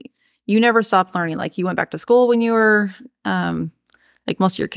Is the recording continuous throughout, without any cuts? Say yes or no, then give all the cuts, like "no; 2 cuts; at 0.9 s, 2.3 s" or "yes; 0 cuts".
yes; 0 cuts